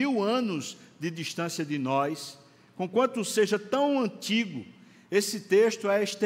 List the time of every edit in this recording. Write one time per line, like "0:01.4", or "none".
none